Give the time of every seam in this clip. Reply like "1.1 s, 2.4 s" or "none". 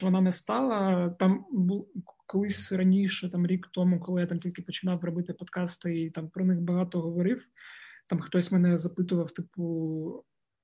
none